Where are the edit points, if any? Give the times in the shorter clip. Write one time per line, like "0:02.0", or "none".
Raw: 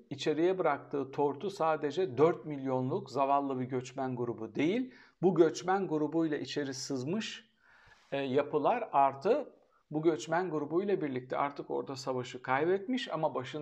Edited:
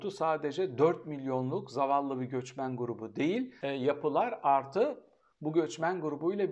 0:03.6